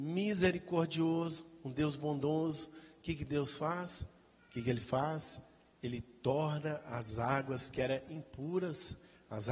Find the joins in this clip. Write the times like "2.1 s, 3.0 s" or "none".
4.4 s